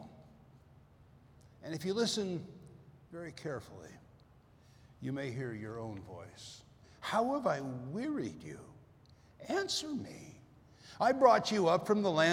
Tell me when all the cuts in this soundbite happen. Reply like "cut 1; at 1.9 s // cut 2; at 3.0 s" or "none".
cut 1; at 6.8 s